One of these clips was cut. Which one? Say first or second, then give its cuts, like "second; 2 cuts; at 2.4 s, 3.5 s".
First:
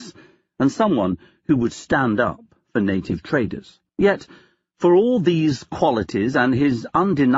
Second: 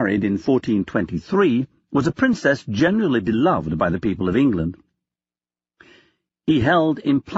first; 1 cut; at 3.9 s